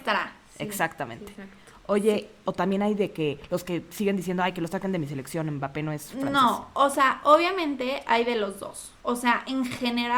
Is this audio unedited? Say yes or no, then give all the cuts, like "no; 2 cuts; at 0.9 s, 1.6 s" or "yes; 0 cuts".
no; 1 cut; at 2.4 s